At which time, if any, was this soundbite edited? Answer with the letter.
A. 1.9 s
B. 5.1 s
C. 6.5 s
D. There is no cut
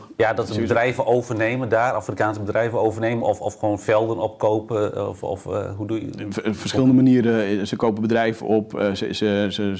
D